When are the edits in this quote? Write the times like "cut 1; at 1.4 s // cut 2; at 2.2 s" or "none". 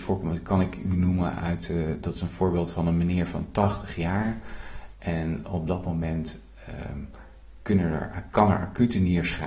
cut 1; at 4.9 s